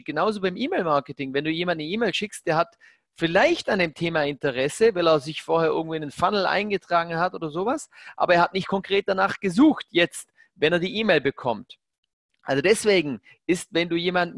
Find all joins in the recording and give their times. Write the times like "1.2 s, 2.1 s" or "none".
none